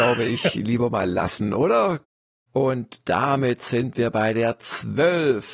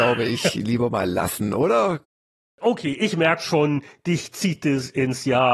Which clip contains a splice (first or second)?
first